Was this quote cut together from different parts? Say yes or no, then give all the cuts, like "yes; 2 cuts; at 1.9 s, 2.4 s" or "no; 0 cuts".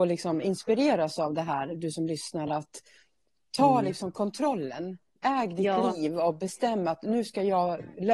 no; 0 cuts